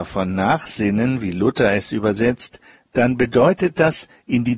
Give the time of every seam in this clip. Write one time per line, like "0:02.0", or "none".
none